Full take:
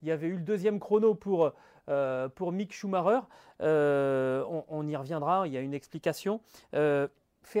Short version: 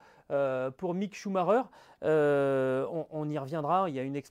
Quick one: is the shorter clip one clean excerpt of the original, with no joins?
yes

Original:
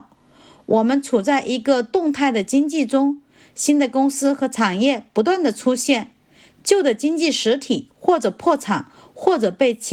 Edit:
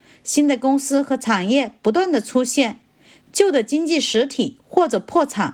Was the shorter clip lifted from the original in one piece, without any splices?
yes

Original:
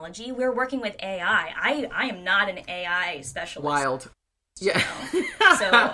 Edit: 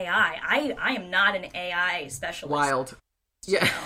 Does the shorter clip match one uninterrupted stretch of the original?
yes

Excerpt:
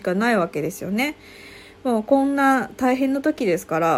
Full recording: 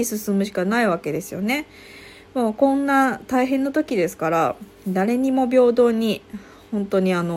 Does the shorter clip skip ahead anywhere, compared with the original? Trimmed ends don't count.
no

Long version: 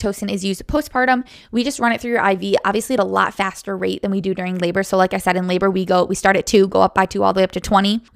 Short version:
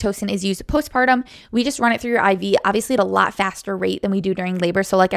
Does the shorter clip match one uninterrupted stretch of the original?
yes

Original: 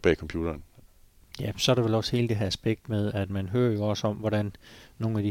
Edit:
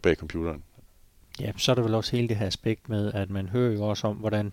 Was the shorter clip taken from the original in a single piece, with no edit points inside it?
yes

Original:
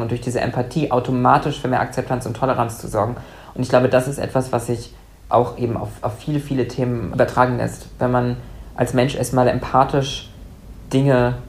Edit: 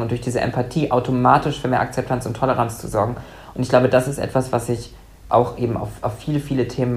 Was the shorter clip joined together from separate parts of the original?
no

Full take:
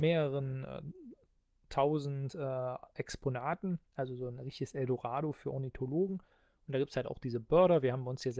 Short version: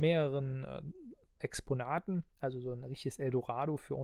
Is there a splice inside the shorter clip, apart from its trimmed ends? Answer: yes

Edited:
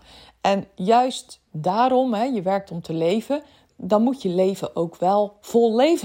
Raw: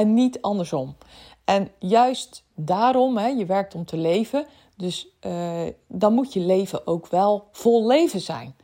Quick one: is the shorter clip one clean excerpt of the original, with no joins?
no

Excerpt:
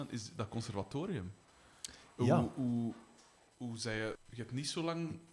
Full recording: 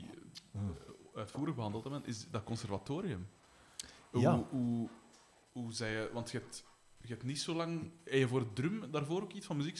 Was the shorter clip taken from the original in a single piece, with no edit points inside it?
no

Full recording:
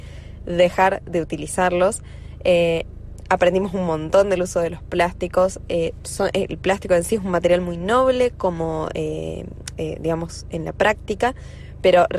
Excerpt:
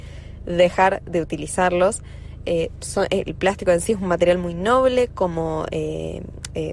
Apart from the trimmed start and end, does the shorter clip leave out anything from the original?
yes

